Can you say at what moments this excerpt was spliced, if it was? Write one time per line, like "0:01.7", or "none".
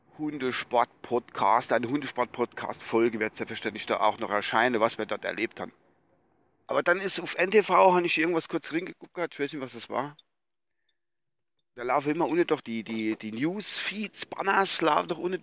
0:06.6